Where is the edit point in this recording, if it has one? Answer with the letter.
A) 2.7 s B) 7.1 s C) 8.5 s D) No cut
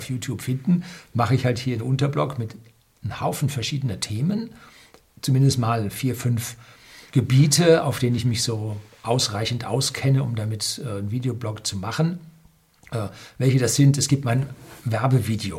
B